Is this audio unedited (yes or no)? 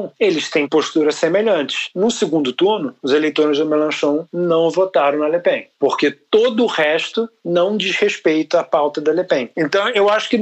yes